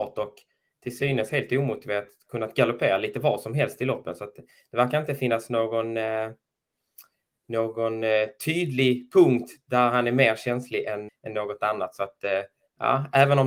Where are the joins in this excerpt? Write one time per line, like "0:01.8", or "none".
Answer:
0:11.1